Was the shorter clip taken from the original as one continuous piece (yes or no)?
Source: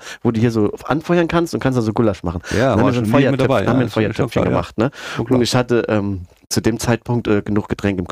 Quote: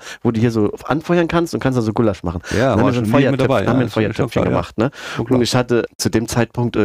no